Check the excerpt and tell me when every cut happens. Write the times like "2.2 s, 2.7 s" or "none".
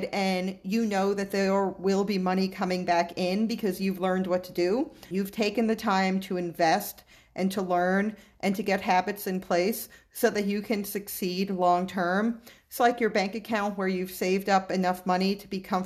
5.1 s, 12.8 s